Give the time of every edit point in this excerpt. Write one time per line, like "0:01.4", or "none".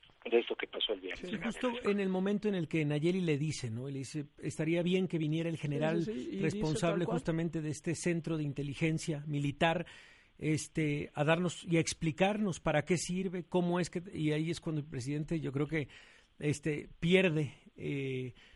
none